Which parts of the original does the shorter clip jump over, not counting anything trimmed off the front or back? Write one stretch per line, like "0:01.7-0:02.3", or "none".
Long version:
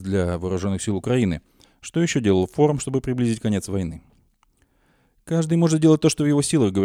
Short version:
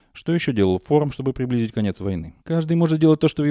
0:04.1-0:05.2